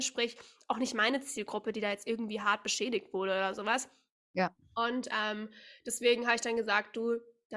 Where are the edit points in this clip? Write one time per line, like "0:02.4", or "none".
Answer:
none